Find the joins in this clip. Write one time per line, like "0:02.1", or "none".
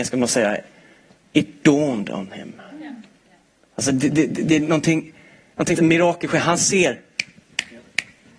0:05.8